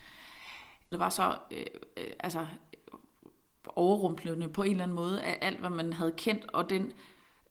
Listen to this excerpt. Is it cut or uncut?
cut